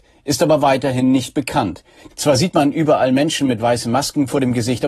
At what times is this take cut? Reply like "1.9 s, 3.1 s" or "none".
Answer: 2.1 s